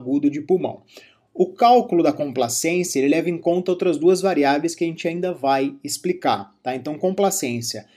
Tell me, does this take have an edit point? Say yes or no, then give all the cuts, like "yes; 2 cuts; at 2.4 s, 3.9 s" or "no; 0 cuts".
no; 0 cuts